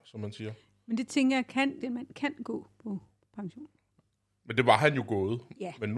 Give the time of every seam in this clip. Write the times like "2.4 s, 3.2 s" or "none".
1.8 s